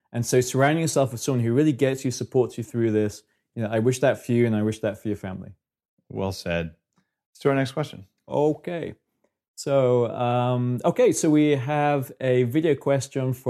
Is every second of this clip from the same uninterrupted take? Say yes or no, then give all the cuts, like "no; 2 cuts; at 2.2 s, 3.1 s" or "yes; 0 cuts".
yes; 0 cuts